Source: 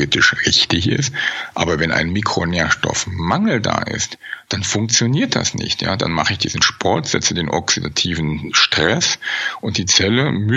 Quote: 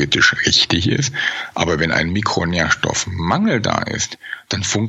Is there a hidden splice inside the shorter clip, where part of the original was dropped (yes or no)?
no